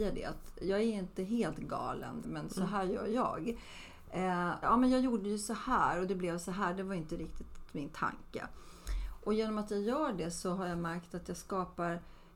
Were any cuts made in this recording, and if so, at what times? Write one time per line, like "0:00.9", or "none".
0:02.2
0:04.6